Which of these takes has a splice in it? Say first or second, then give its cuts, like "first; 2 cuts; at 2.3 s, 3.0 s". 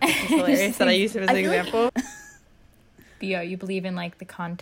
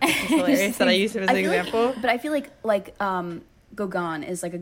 first; 1 cut; at 1.9 s